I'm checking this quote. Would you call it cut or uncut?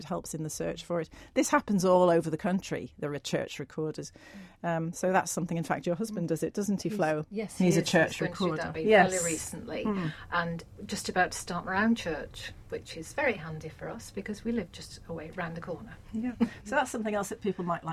cut